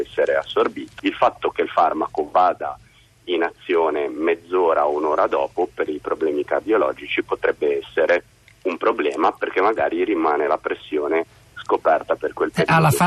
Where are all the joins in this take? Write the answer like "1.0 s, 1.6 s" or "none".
1.0 s